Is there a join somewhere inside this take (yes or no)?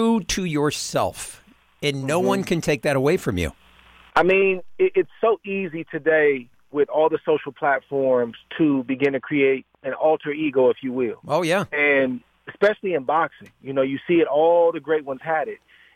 no